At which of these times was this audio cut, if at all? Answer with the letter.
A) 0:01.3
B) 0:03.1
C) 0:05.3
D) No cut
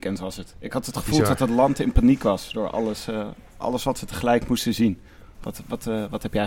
C